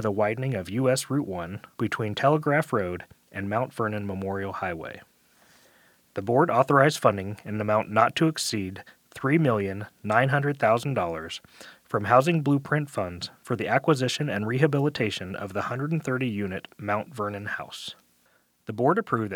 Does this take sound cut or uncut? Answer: cut